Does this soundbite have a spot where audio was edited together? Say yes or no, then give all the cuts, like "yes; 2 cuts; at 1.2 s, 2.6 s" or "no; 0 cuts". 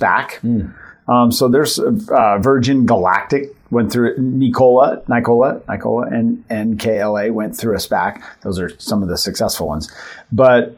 no; 0 cuts